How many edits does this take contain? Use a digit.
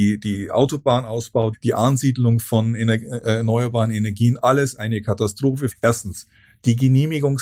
2